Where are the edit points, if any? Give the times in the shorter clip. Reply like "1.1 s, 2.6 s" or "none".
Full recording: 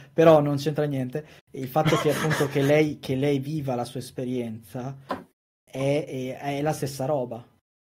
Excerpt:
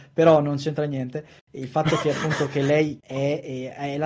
3.0 s